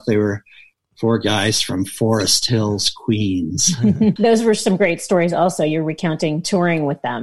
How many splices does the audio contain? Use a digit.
1